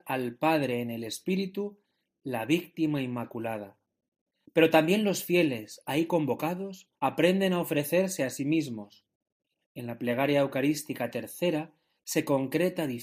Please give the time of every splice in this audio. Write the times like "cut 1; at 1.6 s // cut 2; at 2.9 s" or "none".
cut 1; at 7.0 s